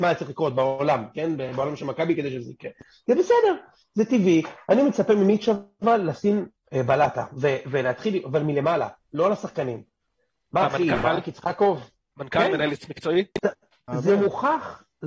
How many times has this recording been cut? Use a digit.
0